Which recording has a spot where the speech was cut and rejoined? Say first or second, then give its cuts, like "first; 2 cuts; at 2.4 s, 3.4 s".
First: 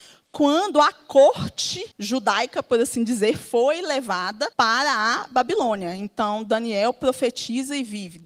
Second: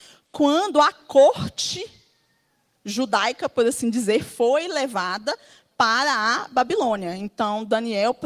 first; 2 cuts; at 1.9 s, 4.5 s